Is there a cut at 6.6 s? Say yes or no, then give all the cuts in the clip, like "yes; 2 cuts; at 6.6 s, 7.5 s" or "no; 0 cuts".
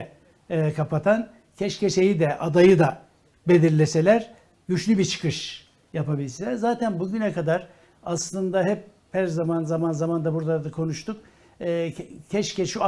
no; 0 cuts